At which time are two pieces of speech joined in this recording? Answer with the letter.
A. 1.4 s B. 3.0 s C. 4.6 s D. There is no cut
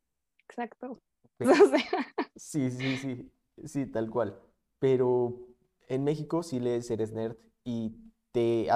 A